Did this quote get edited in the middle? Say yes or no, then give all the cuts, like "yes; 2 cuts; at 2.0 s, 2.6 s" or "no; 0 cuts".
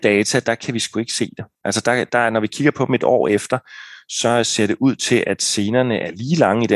no; 0 cuts